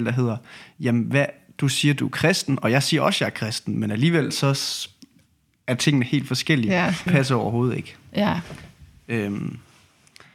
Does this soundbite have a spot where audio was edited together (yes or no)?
yes